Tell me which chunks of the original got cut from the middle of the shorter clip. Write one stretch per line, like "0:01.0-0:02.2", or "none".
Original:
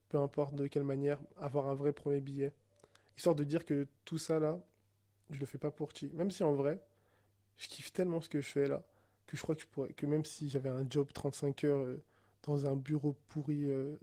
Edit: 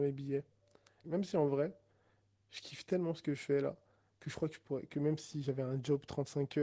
0:03.1-0:06.1

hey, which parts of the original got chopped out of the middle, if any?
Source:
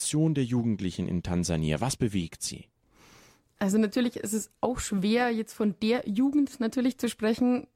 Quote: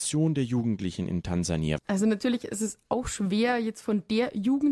0:01.8-0:03.5

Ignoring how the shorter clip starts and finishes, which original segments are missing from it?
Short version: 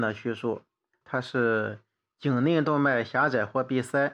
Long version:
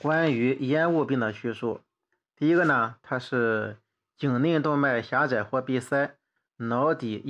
0:02.2-0:03.0

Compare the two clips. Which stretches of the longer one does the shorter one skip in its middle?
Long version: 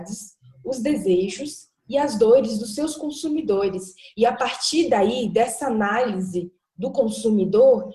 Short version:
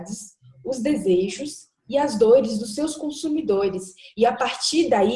none

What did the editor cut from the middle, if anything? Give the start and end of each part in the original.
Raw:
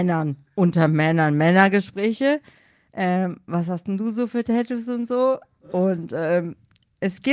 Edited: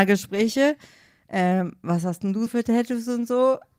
0:04.1-0:04.3

